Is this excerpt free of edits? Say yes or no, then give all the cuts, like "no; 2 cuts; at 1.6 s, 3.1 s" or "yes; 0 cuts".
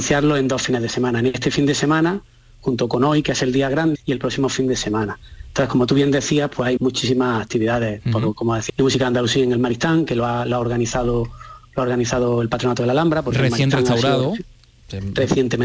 no; 3 cuts; at 3.9 s, 6.8 s, 8.7 s